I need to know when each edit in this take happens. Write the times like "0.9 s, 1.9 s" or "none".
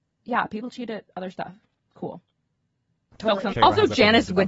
3.5 s